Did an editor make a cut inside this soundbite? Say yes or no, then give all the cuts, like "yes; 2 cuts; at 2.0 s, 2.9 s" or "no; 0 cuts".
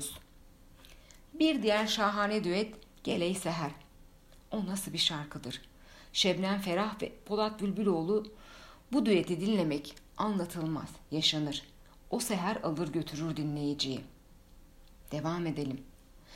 no; 0 cuts